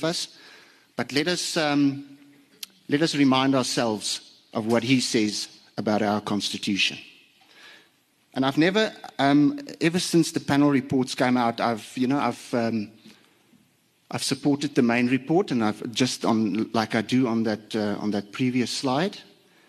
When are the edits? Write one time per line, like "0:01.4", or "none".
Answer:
none